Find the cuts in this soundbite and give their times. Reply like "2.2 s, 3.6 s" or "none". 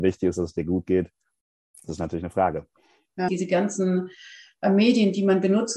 1.7 s, 3.3 s